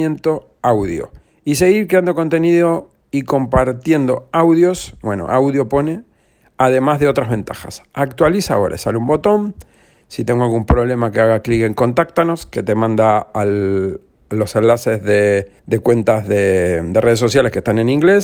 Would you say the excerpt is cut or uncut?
cut